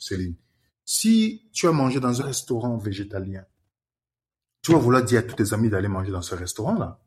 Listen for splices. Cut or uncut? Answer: cut